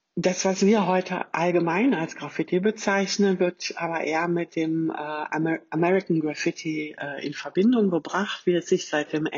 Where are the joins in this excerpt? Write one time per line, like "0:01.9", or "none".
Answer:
none